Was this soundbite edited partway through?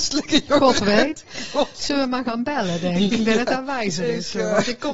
no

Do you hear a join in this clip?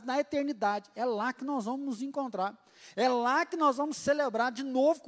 no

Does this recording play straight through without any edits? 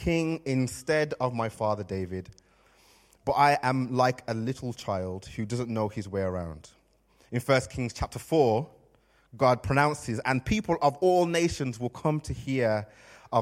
no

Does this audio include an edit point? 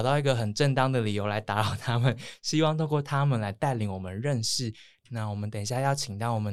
yes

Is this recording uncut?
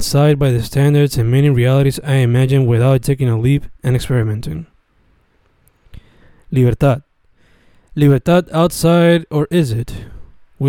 no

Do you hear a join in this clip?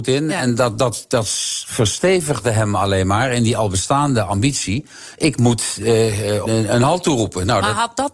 yes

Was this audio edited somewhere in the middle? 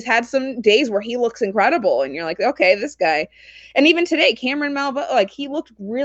no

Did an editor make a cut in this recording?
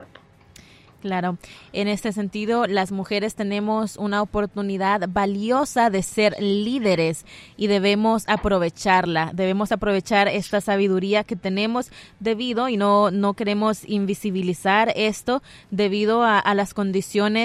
no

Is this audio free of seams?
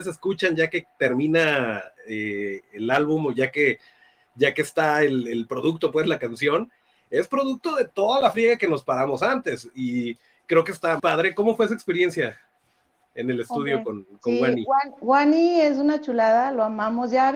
no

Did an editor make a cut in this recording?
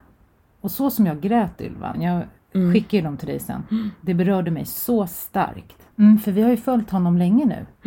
yes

